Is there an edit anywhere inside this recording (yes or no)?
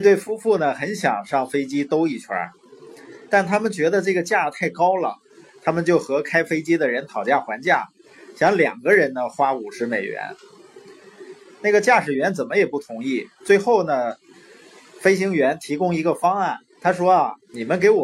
no